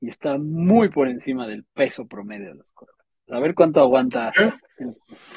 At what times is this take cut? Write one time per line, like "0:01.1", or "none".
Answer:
0:03.3